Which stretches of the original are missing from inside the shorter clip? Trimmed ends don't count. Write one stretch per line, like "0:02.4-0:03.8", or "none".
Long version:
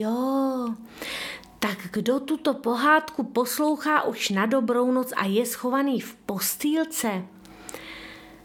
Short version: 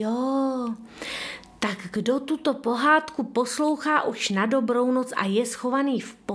none